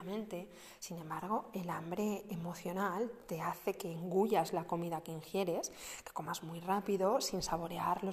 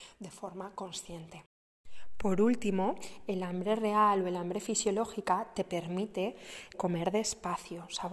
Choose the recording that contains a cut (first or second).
second